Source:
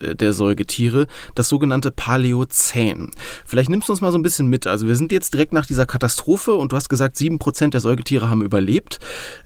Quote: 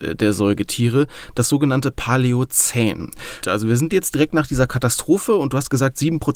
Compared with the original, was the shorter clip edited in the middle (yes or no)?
yes